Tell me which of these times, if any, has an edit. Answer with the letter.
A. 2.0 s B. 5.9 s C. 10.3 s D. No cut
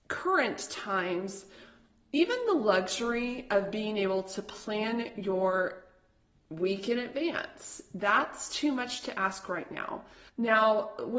C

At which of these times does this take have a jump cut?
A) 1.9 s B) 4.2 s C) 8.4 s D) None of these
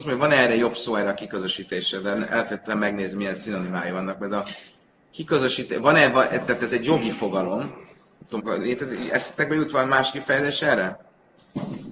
C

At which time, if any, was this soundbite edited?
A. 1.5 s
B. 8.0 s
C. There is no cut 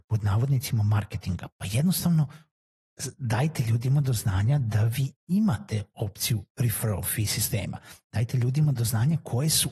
A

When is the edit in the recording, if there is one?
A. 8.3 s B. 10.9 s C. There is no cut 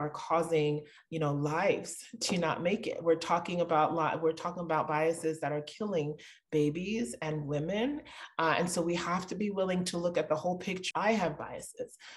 B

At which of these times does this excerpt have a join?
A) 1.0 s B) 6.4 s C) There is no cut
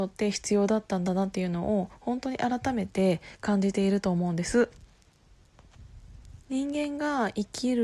B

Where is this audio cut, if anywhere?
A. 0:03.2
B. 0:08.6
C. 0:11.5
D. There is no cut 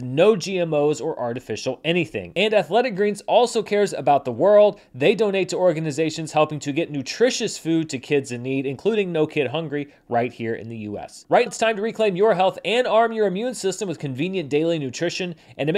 C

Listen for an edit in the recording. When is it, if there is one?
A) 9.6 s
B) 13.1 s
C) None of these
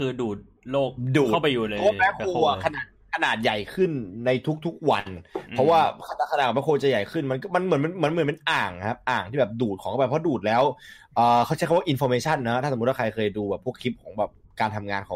C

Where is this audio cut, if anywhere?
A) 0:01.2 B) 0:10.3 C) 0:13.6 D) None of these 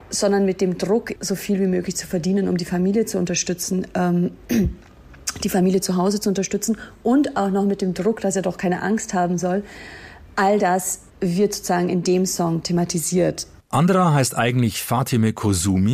A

